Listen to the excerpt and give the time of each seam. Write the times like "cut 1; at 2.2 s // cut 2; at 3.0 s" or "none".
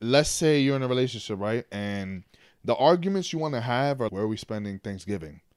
cut 1; at 4.1 s